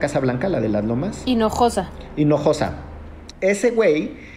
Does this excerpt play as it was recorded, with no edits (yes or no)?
no